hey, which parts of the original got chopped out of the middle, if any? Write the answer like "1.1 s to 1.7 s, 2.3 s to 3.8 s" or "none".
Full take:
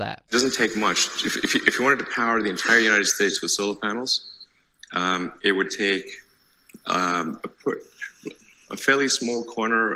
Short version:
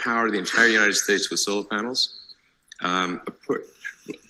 5.4 s to 7.4 s